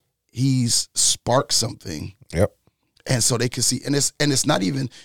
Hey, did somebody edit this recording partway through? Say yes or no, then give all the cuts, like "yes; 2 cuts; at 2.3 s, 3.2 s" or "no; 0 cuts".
no; 0 cuts